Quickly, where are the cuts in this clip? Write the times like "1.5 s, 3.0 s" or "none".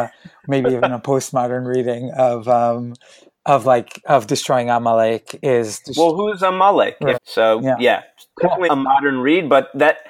7.1 s, 8.7 s

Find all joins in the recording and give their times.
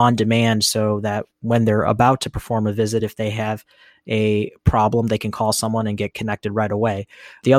none

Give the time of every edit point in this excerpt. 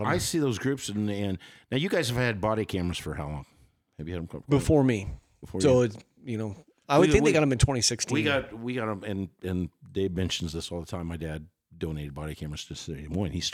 none

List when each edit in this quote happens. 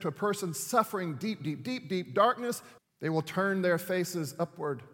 2.8 s

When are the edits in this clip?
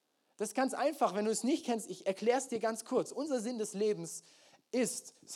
none

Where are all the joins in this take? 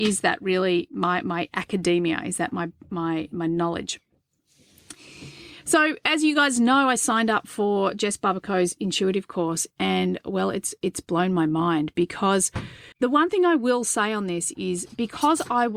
12.9 s

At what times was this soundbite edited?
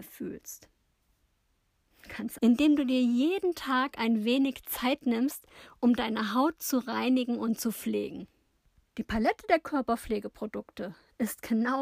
2.4 s, 8.8 s

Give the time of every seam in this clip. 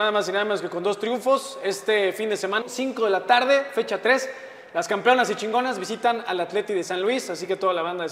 2.6 s

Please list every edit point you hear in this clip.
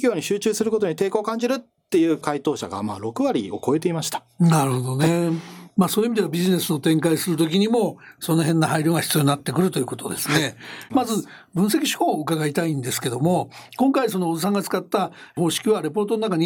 10.9 s

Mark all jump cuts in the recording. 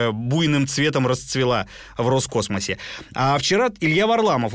none

